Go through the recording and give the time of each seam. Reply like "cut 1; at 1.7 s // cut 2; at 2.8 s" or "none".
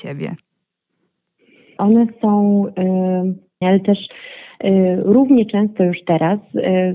cut 1; at 1.8 s // cut 2; at 3.6 s